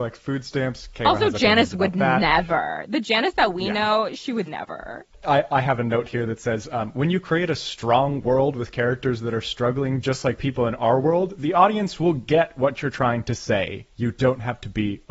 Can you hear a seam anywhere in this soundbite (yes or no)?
yes